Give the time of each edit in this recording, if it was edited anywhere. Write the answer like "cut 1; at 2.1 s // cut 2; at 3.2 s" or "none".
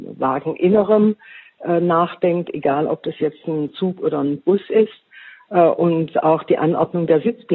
none